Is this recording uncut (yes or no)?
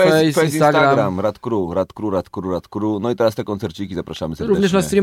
yes